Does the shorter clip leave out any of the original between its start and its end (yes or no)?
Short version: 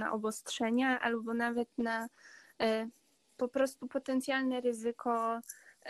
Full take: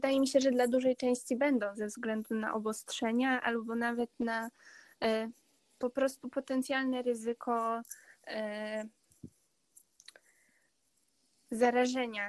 no